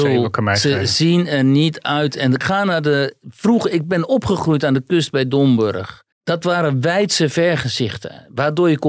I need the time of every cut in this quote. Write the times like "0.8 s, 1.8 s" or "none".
2.4 s, 6.1 s